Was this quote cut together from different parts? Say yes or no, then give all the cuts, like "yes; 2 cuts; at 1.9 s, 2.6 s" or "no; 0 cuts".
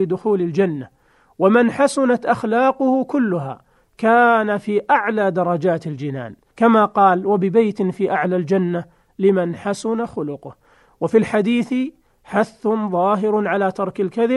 yes; 1 cut; at 6.5 s